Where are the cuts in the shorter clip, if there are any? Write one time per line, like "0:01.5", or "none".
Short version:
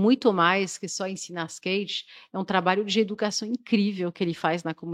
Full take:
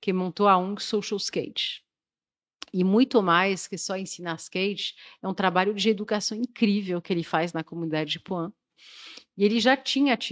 none

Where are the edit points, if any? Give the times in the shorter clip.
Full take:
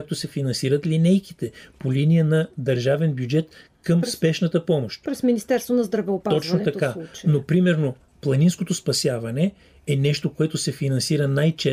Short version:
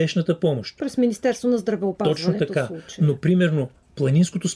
none

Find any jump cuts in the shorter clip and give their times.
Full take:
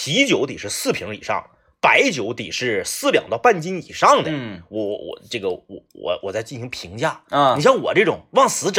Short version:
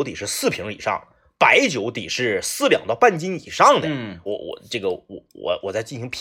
0:04.3

